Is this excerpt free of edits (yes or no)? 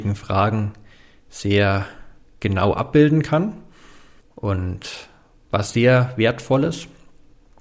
no